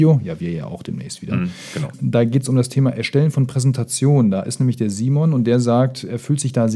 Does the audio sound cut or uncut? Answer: uncut